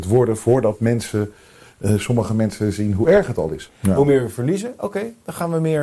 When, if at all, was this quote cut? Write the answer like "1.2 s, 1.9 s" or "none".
3.7 s